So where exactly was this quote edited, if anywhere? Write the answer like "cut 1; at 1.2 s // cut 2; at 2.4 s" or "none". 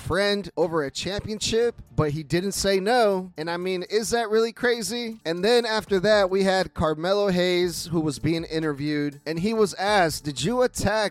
cut 1; at 5.2 s